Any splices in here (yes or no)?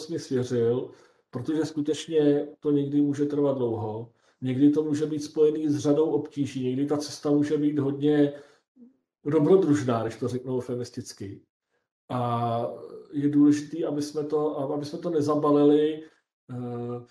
no